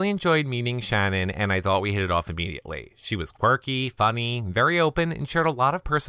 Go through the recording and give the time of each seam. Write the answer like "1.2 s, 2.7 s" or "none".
none